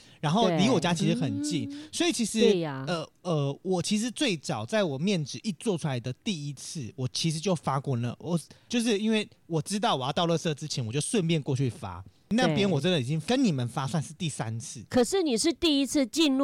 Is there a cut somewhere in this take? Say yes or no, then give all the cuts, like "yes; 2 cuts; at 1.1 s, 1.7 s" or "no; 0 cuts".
yes; 1 cut; at 8.7 s